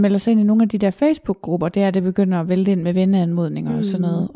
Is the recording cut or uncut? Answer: uncut